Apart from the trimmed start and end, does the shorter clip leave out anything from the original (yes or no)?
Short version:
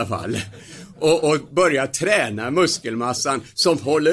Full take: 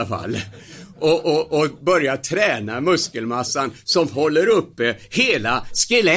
yes